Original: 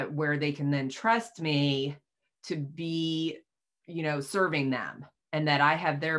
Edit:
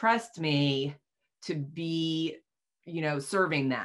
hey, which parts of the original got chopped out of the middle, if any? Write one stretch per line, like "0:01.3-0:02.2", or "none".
none